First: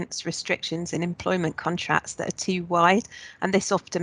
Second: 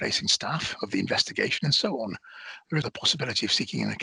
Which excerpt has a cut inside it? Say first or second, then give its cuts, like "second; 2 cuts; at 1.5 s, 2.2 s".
second; 1 cut; at 2.8 s